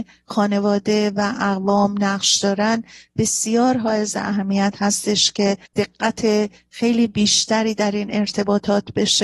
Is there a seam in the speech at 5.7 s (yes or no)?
yes